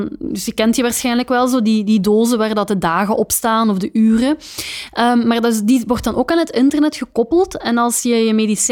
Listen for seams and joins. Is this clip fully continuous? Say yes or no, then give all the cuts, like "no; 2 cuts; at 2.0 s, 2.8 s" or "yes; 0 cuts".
yes; 0 cuts